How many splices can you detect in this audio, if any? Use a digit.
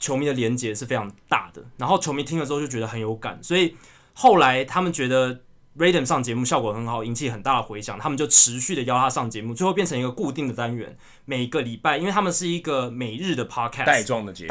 0